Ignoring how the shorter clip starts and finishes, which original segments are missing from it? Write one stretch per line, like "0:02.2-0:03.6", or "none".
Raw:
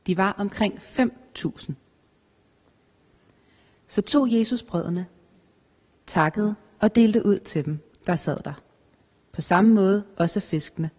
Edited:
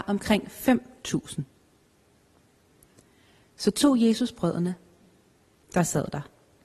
0:05.9-0:08.0